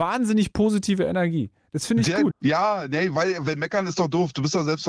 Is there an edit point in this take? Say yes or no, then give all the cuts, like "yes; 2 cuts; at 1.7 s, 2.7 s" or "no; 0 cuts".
yes; 1 cut; at 2.3 s